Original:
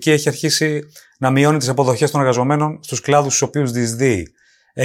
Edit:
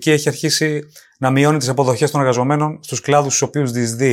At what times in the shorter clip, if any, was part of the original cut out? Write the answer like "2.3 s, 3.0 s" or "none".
none